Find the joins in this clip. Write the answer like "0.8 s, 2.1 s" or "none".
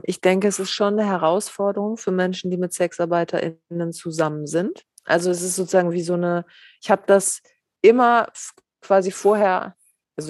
none